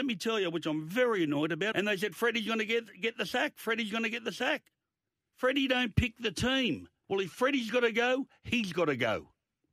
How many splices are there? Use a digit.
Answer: 2